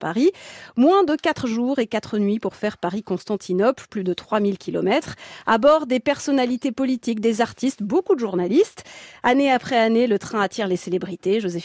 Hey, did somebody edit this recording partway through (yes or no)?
no